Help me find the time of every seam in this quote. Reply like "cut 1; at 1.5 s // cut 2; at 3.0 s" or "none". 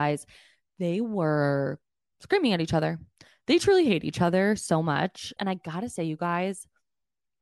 cut 1; at 5.4 s